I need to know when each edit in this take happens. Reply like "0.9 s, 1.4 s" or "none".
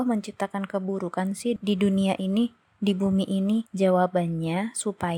3.6 s